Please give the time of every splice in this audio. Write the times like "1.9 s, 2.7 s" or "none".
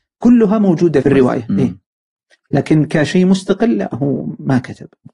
1.0 s